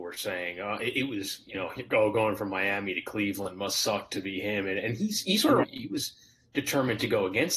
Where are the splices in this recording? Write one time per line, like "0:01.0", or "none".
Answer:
0:05.6